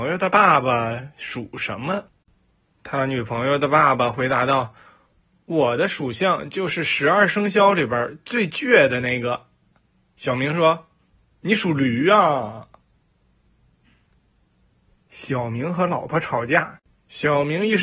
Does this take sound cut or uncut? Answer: uncut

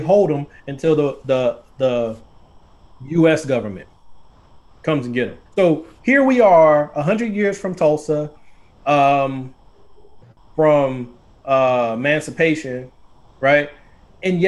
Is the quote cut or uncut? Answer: cut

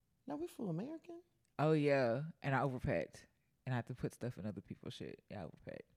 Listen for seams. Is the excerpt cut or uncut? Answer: uncut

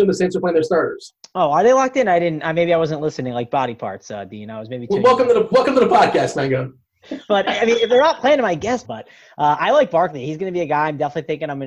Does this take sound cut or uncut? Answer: cut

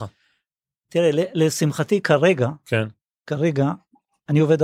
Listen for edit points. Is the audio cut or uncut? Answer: uncut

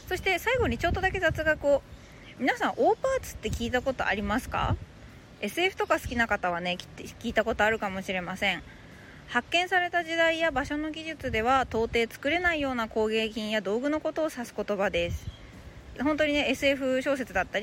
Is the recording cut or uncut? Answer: cut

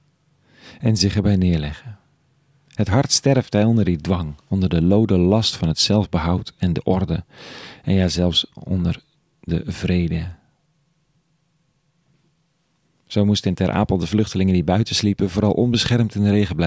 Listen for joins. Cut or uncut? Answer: uncut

